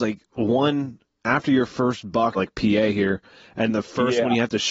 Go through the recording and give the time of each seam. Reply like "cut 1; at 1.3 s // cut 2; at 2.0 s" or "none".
cut 1; at 2.4 s